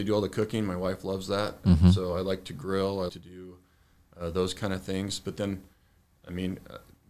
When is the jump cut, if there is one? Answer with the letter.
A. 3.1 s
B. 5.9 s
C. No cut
A